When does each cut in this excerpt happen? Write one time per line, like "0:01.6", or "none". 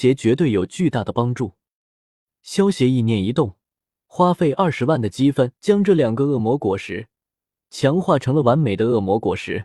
0:04.0
0:05.6